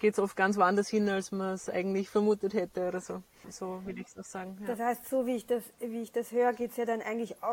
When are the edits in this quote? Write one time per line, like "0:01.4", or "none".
0:03.4